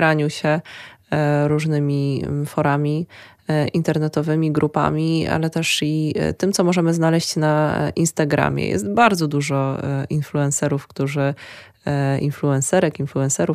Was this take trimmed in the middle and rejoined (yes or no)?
no